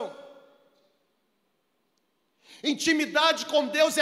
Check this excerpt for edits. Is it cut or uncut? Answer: uncut